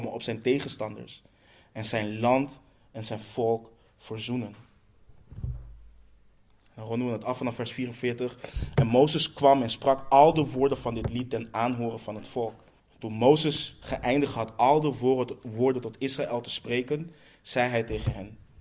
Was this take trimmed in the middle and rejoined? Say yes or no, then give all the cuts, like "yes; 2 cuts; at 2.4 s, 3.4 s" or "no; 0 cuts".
yes; 1 cut; at 12.8 s